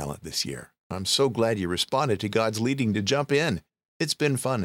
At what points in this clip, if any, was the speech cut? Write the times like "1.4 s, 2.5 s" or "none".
none